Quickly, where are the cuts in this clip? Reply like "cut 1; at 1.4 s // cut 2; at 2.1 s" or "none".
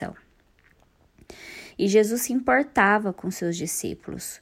cut 1; at 1.7 s

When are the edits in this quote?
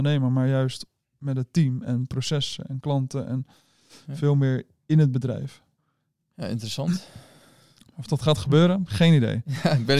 cut 1; at 6.2 s

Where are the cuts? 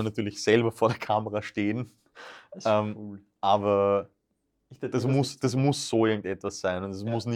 none

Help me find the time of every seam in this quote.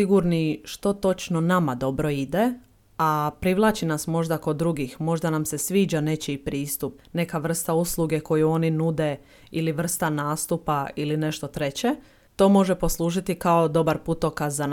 cut 1; at 7.0 s

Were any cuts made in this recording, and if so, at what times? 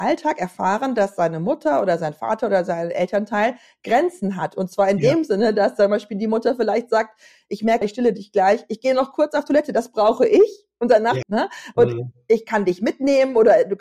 cut 1; at 7.8 s // cut 2; at 11.2 s

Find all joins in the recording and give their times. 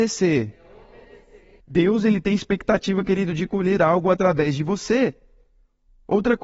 cut 1; at 1.6 s

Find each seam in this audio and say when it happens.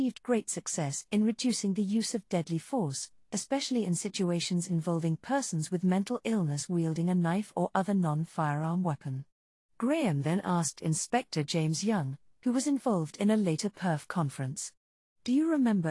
none

